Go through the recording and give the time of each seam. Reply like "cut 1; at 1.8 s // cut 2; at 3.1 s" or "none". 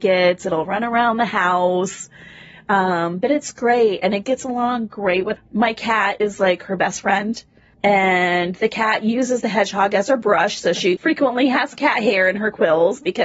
cut 1; at 5.4 s // cut 2; at 11.0 s